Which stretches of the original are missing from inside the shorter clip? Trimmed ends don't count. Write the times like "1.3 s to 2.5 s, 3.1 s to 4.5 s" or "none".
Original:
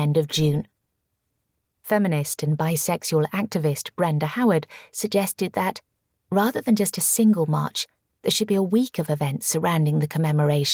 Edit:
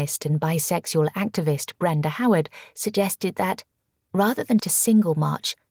6.8 s to 6.9 s